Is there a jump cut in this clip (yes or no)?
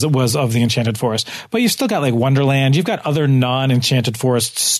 no